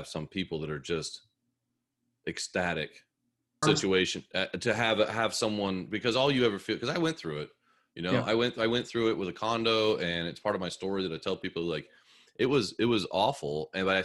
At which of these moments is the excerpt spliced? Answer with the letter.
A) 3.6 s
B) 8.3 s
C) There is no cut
A